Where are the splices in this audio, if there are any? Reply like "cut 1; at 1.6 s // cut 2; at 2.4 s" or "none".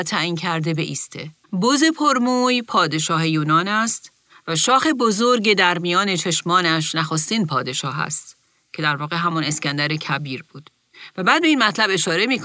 cut 1; at 1.4 s